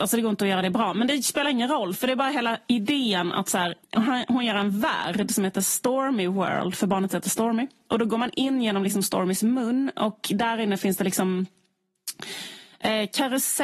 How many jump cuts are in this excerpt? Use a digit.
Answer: 1